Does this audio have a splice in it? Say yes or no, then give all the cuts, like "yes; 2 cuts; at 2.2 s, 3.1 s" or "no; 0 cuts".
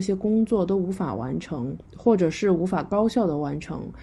yes; 1 cut; at 1.9 s